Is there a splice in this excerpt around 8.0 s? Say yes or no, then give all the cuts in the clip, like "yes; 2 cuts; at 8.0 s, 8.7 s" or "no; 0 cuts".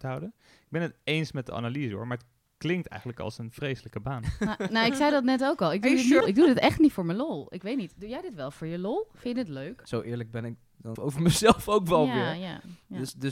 no; 3 cuts; at 6.2 s, 9.8 s, 11.0 s